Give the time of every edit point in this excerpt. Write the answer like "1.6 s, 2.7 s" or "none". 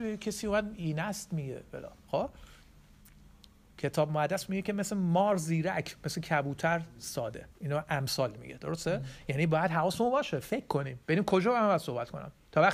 7.5 s, 11.0 s